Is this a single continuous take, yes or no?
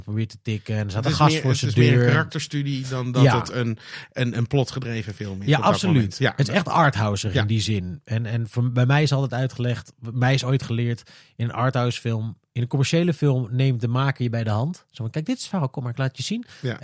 yes